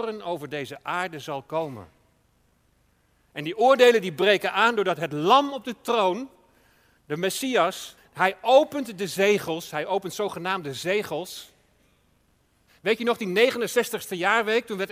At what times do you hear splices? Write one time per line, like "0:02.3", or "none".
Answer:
0:08.0
0:12.7